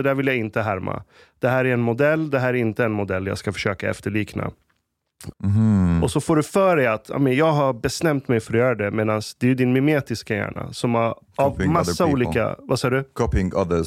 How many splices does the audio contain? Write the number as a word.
one